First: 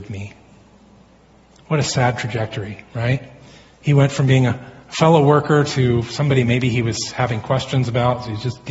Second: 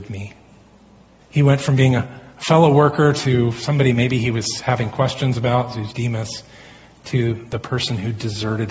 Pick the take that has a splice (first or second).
second